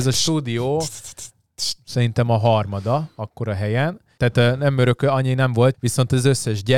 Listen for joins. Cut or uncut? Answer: cut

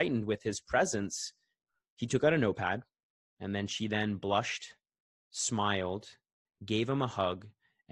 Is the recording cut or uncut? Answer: cut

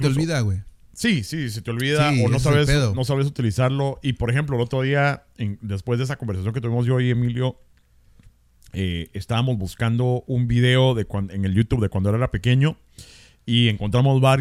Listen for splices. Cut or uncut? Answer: uncut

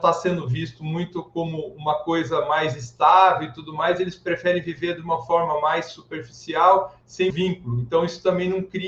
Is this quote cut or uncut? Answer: cut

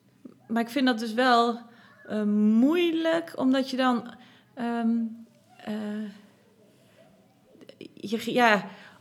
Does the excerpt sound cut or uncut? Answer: uncut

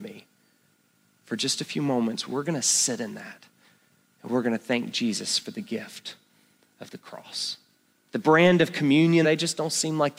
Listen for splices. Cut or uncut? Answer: cut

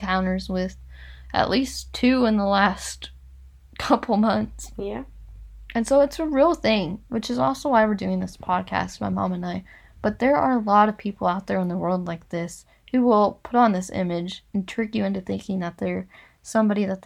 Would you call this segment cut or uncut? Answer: uncut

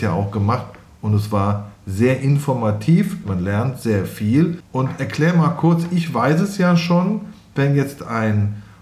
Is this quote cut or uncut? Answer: cut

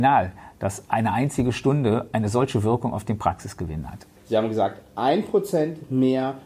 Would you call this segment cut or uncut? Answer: cut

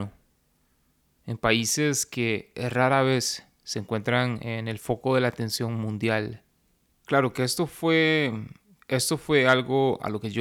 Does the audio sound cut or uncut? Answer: cut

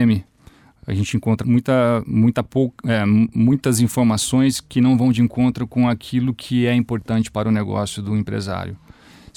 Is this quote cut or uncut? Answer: cut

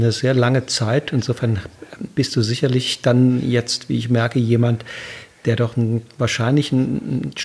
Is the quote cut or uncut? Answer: uncut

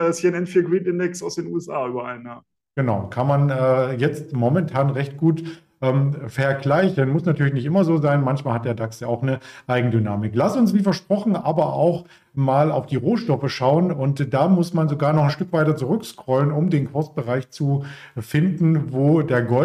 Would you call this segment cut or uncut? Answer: uncut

